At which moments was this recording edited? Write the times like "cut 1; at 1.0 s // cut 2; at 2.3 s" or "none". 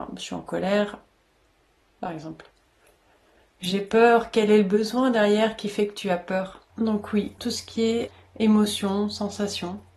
cut 1; at 2.0 s // cut 2; at 6.7 s